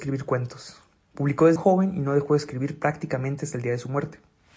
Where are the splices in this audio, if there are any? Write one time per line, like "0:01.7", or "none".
0:01.6